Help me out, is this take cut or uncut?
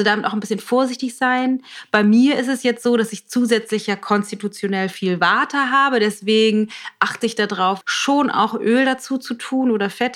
cut